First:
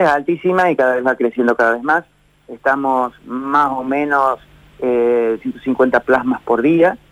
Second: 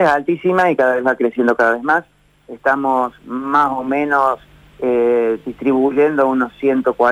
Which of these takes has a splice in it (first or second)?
first